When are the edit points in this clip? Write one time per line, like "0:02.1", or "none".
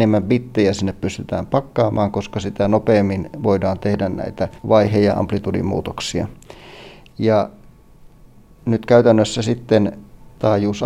0:04.6

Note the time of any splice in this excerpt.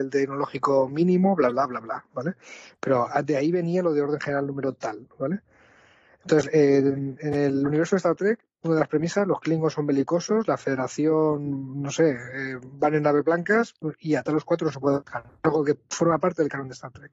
none

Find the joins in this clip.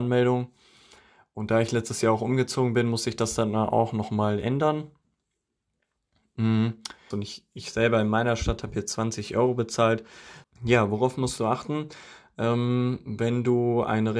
0:07.1
0:10.4

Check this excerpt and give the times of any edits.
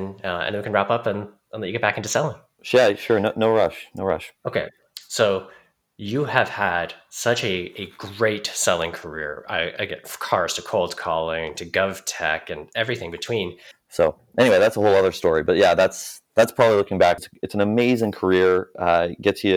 0:13.7
0:17.2

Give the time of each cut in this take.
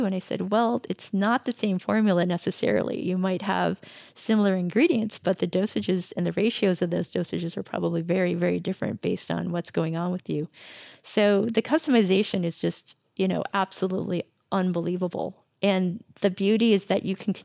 none

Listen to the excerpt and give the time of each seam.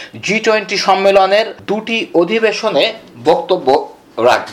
none

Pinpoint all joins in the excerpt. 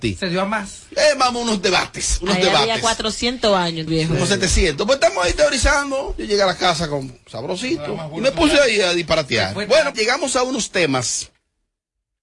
0:03.9
0:09.9

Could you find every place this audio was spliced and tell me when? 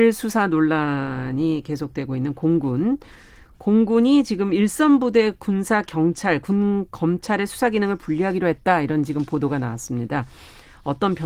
none

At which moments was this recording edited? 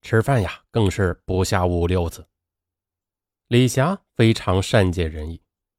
none

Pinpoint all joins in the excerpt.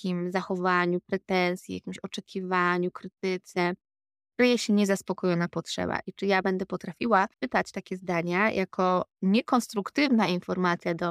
0:07.3
0:09.1

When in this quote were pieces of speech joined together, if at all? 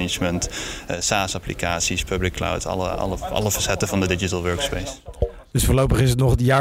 none

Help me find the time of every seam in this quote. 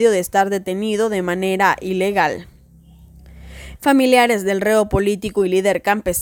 0:03.8

